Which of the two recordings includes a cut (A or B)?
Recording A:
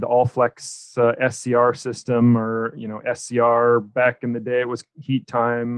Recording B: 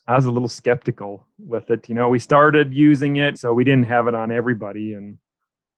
B